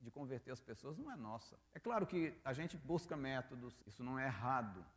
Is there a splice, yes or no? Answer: yes